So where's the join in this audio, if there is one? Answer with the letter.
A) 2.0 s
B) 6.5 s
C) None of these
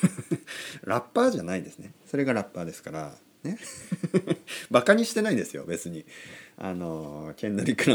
A